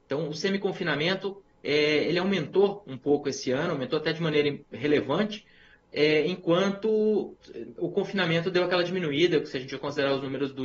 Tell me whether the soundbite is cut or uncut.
uncut